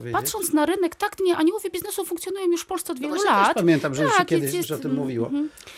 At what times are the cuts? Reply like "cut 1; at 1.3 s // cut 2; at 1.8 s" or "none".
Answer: cut 1; at 4.6 s